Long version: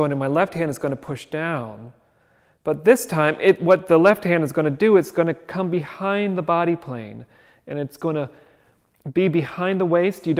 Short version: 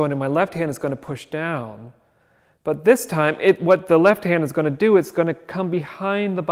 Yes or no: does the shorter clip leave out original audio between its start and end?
no